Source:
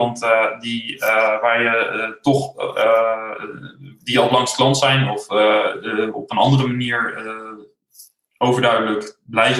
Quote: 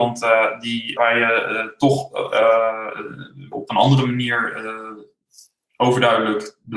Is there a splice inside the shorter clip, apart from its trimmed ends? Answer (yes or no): yes